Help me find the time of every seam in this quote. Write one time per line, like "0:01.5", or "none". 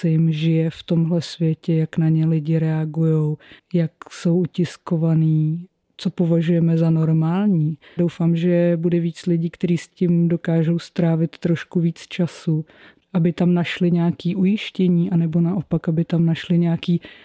0:08.0